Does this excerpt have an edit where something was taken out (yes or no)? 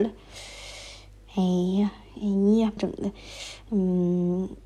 yes